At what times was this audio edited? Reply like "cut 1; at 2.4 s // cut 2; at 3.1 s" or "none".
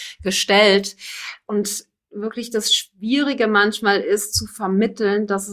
none

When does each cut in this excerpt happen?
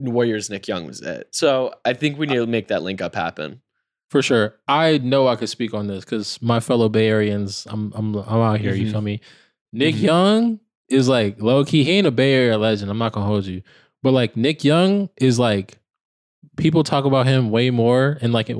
none

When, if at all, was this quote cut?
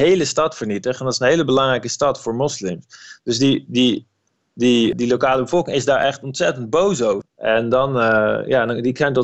cut 1; at 4.9 s // cut 2; at 7.2 s

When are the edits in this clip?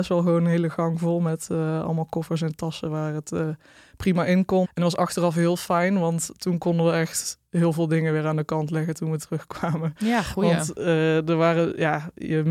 cut 1; at 4.6 s

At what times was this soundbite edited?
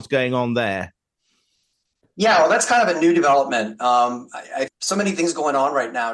cut 1; at 4.7 s

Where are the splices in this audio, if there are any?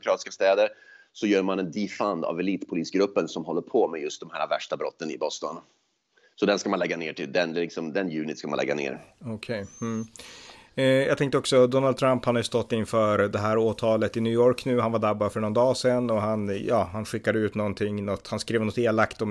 none

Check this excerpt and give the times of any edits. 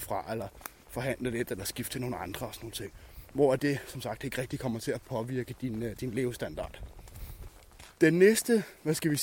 none

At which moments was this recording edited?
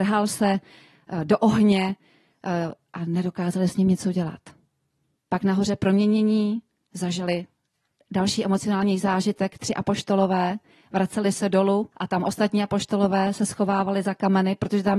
cut 1; at 5.1 s // cut 2; at 11.9 s

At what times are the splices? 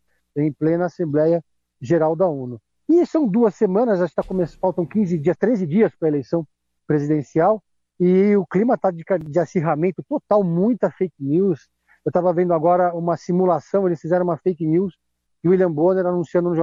none

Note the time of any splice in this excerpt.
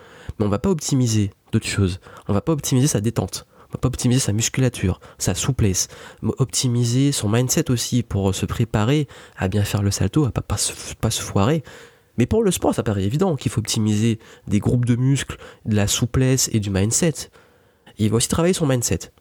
cut 1; at 12.1 s // cut 2; at 17.9 s

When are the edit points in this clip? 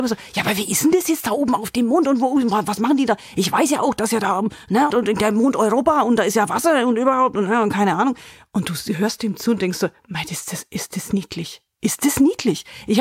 cut 1; at 4.9 s

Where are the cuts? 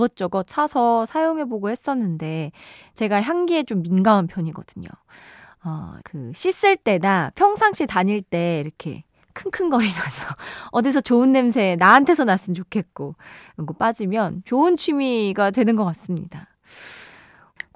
cut 1; at 6.0 s

